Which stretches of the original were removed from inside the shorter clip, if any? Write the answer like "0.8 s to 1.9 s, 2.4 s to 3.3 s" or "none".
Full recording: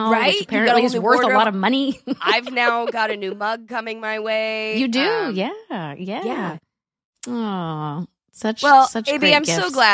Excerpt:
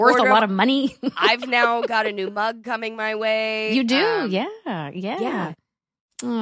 none